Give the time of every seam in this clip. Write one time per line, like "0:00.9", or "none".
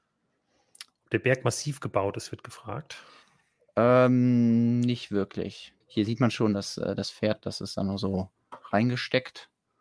0:01.0
0:05.8